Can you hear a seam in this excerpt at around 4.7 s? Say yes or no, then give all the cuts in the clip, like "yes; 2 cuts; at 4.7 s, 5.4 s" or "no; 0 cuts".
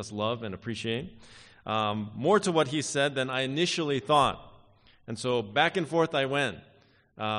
no; 0 cuts